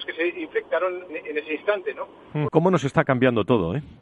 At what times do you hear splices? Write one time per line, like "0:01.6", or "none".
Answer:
0:01.1
0:02.5

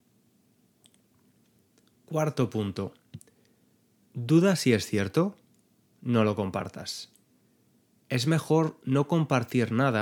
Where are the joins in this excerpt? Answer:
none

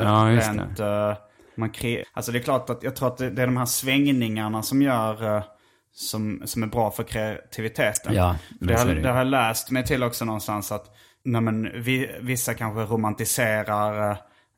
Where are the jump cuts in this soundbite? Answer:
0:02.0

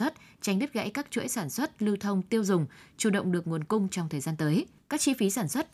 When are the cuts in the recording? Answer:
0:04.8

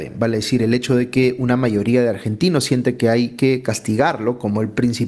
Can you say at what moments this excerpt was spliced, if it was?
none

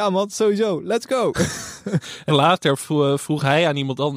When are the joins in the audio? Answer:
0:02.3

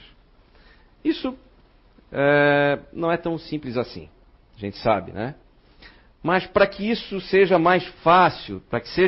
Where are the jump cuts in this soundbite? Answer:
none

